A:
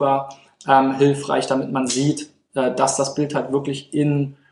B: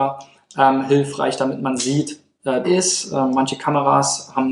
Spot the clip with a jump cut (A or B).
B